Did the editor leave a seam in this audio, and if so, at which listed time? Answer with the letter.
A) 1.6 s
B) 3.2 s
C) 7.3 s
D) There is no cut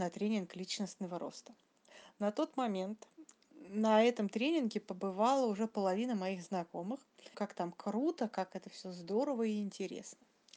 C